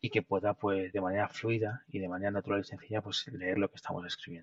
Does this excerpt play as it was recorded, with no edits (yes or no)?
yes